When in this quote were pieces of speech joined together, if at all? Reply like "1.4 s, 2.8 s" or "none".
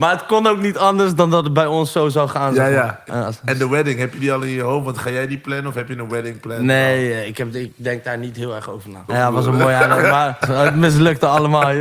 3.1 s, 9.1 s, 10.4 s